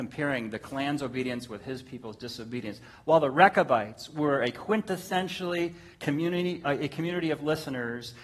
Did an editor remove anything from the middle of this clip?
no; 0 cuts

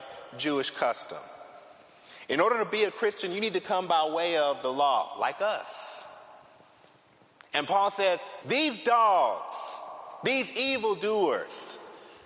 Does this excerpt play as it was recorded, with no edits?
no; 1 cut; at 8.4 s

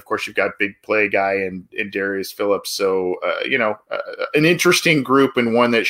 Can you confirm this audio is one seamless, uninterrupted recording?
yes; 0 cuts

